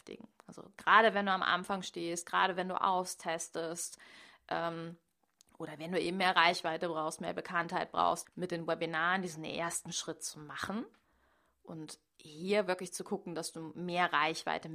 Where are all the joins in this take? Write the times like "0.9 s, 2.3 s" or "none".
8.2 s